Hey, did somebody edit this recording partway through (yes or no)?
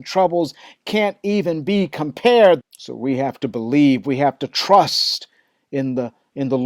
yes